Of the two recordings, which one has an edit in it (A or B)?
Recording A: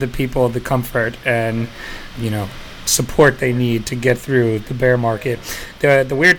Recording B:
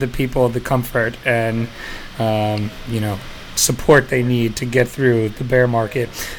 A